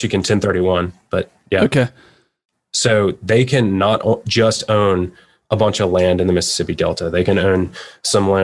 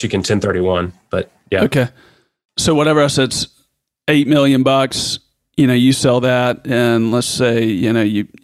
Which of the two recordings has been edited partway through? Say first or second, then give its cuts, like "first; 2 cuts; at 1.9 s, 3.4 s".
first; 1 cut; at 2.5 s